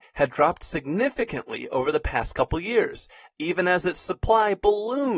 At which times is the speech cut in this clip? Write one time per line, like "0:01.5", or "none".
none